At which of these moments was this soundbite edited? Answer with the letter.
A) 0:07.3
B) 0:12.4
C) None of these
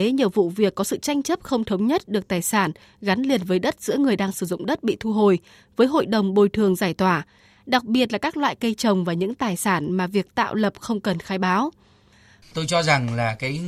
B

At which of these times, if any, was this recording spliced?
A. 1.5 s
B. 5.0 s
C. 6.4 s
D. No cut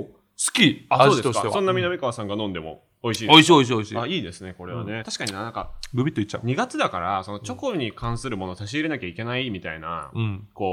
B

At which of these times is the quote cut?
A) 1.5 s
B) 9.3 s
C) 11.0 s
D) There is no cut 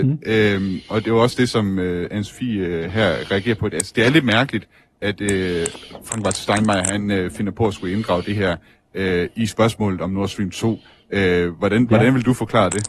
B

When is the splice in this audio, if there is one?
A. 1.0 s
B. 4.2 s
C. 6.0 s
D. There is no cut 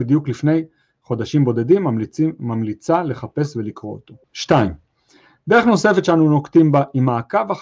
B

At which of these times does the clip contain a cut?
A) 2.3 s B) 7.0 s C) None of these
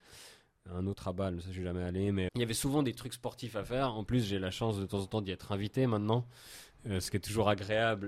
A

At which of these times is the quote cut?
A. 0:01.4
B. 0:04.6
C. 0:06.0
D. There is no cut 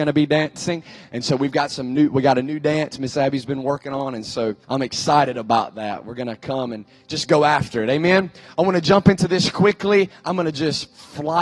B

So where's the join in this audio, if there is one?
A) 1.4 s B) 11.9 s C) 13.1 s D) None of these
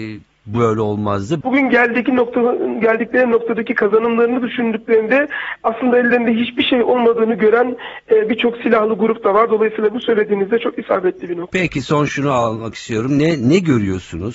A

